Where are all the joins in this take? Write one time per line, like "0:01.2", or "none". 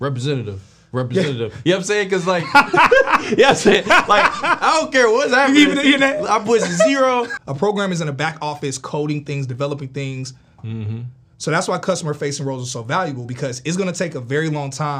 0:07.4
0:10.6

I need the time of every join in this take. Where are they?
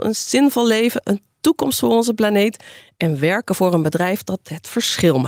none

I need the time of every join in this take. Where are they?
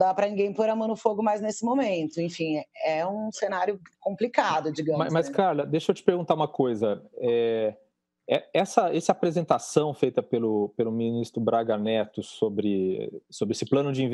none

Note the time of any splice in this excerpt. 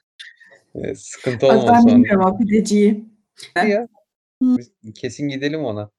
0:03.6
0:04.6

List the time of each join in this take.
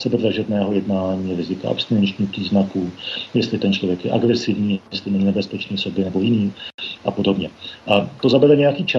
none

